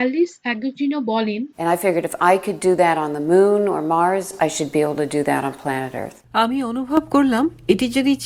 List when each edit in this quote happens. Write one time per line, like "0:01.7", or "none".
0:01.5